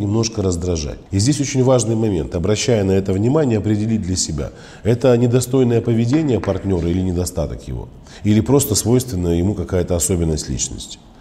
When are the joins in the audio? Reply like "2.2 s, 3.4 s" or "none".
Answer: 1.1 s

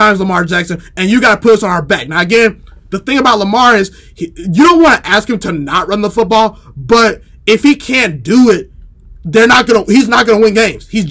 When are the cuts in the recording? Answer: none

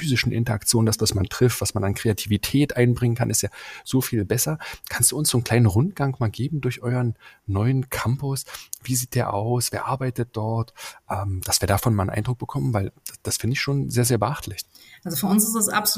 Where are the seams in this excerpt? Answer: none

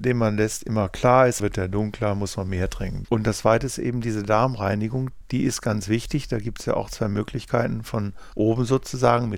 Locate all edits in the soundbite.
1.4 s, 3.0 s

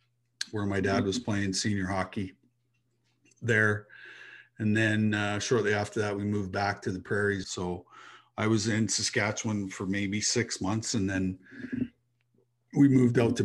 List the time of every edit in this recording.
7.4 s

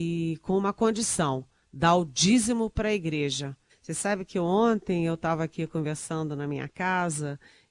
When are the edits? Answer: 3.7 s

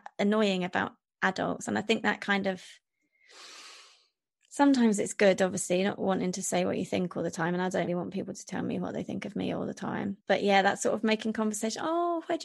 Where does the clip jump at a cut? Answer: 7.9 s, 10.2 s

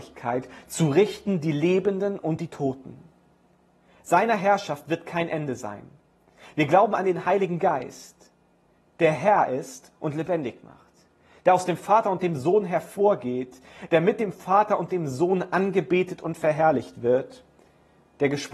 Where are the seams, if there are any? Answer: none

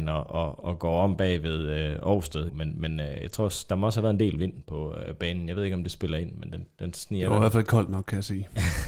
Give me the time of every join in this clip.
2.5 s

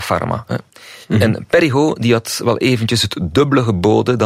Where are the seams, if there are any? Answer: 1.0 s

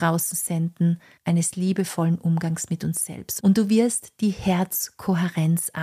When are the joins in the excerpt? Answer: 1.2 s, 3.4 s

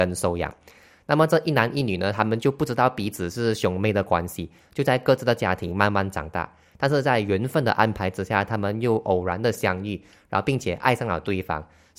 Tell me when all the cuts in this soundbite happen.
none

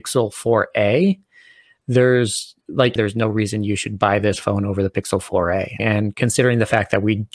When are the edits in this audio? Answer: 3.0 s, 5.8 s

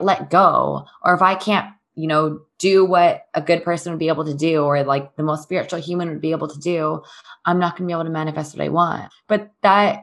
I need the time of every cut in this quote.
9.1 s

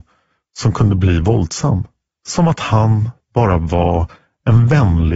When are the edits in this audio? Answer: 2.1 s

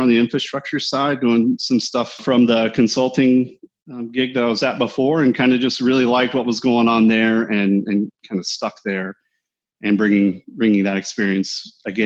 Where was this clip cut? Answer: none

